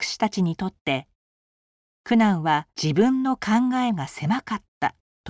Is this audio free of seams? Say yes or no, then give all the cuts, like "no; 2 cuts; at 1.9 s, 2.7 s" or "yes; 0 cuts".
no; 1 cut; at 2.7 s